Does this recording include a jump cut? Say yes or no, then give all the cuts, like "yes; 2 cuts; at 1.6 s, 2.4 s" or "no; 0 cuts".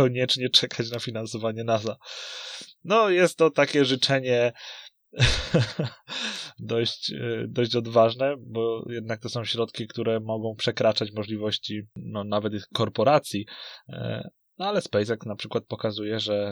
no; 0 cuts